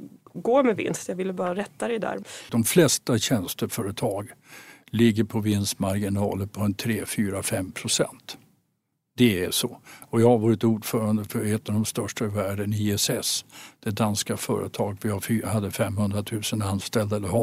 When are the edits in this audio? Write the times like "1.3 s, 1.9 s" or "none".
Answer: 2.5 s